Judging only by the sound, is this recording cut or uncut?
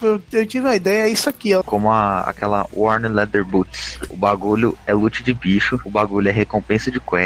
cut